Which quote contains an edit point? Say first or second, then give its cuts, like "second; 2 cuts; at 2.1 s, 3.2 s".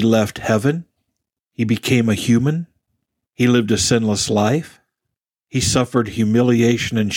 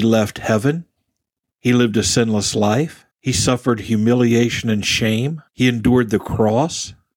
second; 3 cuts; at 1.4 s, 3.1 s, 5.5 s